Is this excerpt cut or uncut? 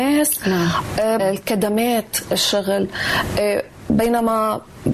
cut